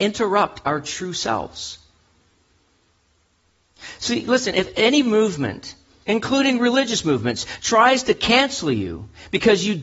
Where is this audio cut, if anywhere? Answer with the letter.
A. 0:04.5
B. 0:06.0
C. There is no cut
B